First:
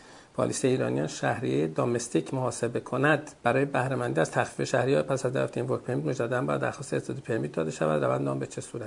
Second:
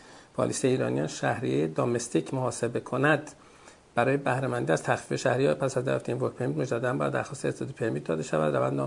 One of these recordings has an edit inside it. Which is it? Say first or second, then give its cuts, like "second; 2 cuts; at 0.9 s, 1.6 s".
first; 1 cut; at 3.4 s